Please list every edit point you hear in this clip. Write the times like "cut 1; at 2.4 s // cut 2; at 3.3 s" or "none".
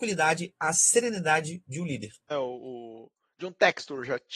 cut 1; at 2.3 s

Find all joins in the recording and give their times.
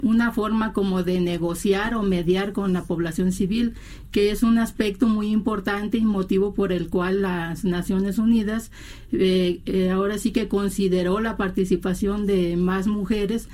none

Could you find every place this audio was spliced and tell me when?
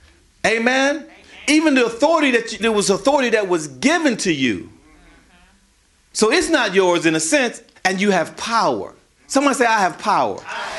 cut 1; at 2.6 s // cut 2; at 7.7 s

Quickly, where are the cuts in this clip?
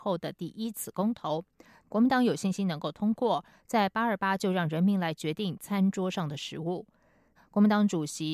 cut 1; at 1.8 s // cut 2; at 7.4 s

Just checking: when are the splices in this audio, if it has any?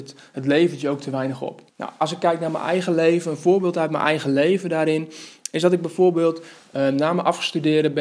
cut 1; at 1.7 s

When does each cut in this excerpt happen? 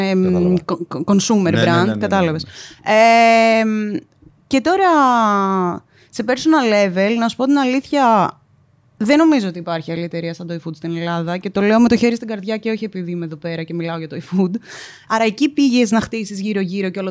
cut 1; at 15.1 s

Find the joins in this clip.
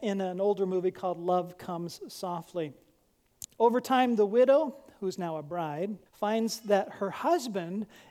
cut 1; at 3.4 s // cut 2; at 6.1 s

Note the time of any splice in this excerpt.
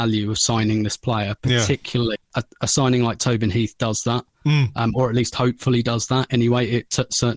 cut 1; at 2.2 s

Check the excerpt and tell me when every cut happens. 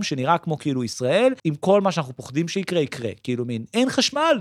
cut 1; at 1.4 s

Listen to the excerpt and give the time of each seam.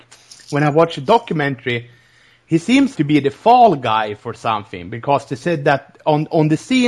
cut 1; at 3.0 s

